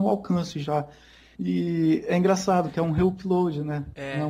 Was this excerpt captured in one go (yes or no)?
no